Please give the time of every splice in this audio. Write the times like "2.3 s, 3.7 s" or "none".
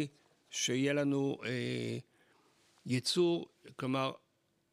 none